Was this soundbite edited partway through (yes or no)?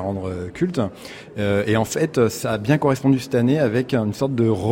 no